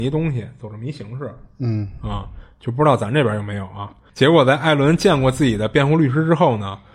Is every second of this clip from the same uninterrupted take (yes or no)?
no